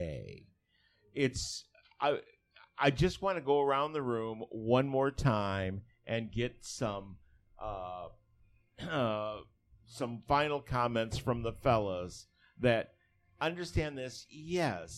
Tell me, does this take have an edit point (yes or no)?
no